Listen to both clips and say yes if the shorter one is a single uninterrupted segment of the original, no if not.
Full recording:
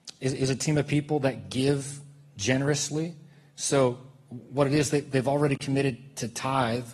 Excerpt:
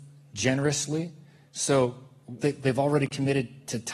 no